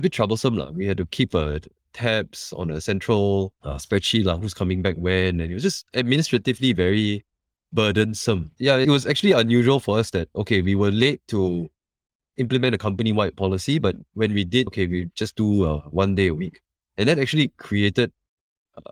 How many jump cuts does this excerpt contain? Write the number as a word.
one